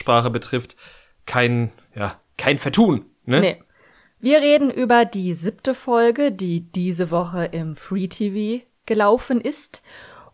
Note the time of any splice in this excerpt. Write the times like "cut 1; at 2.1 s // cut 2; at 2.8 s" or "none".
none